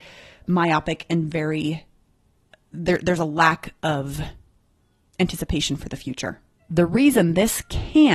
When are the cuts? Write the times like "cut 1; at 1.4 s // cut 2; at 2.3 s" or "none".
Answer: cut 1; at 6.6 s